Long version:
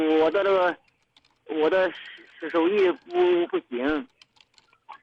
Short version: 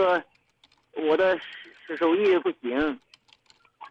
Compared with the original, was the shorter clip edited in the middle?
yes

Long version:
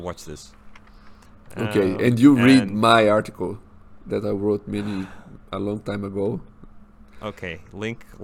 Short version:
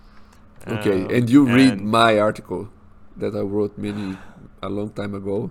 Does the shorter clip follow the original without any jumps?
yes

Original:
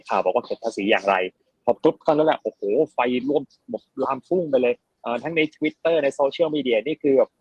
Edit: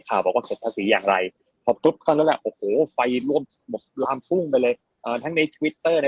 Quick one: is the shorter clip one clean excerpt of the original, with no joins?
yes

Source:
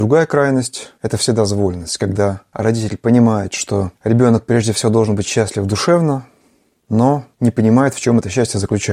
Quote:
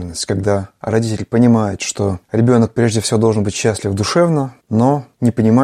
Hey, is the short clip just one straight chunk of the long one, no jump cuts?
no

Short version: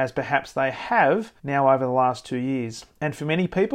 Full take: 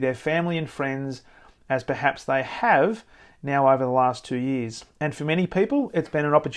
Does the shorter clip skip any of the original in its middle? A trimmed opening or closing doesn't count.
yes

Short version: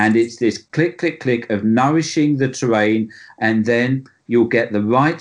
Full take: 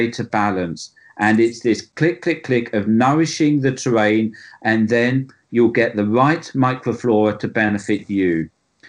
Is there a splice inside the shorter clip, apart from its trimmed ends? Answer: no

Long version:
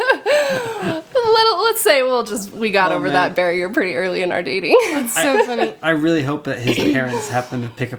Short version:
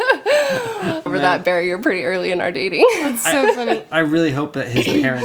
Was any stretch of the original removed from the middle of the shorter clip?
yes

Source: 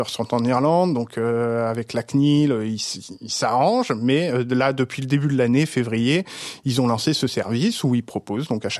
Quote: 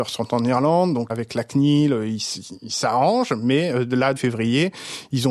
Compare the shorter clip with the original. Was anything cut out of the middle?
yes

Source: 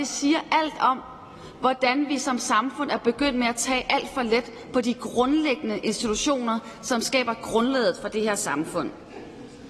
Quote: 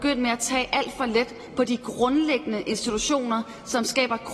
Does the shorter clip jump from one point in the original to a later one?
no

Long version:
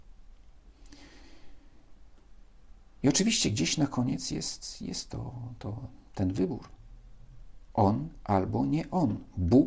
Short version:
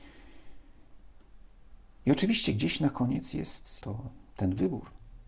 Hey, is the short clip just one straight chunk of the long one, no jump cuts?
no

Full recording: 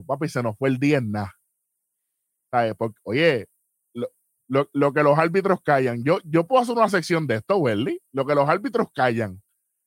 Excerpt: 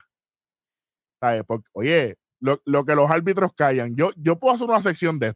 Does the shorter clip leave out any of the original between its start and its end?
yes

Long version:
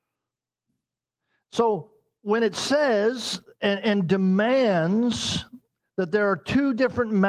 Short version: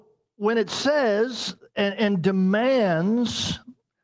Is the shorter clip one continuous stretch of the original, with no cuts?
yes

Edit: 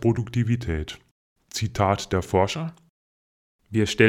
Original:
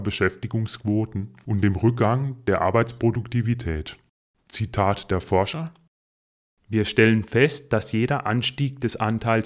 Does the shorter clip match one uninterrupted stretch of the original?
yes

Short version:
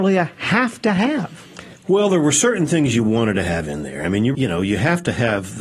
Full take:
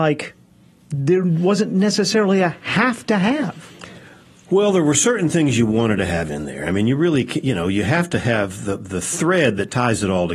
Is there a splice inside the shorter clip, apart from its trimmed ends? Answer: yes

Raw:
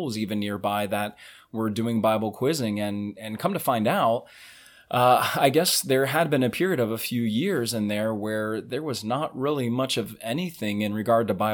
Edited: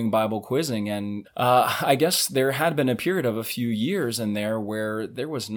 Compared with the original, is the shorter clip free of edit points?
no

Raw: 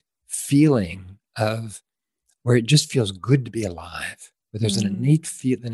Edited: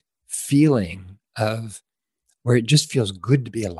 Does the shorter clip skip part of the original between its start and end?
no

